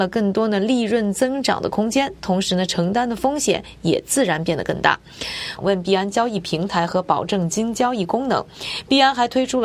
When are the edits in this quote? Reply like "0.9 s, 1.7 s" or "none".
5.6 s